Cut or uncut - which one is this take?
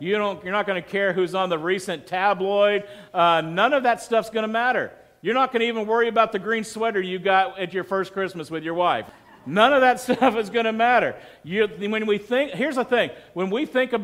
uncut